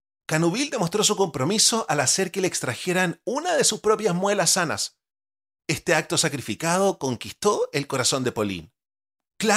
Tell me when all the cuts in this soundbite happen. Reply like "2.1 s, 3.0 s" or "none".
none